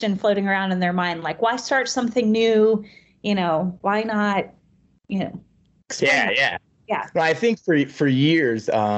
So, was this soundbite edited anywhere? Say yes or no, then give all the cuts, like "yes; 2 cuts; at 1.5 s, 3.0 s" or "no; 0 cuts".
no; 0 cuts